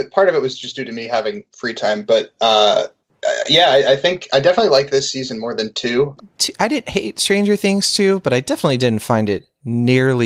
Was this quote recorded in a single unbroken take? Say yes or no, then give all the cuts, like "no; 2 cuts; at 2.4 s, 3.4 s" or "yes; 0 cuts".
no; 1 cut; at 6.2 s